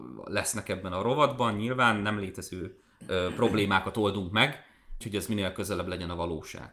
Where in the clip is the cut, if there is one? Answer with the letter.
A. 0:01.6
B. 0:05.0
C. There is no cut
B